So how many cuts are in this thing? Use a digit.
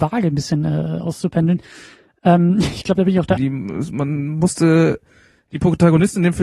1